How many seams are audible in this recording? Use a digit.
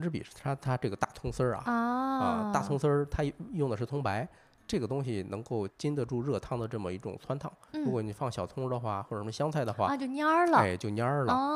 1